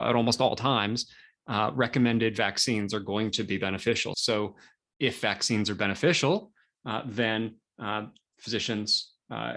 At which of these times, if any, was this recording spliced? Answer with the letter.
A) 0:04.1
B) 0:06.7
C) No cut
A